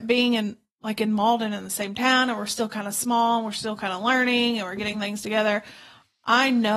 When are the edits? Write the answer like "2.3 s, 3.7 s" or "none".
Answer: none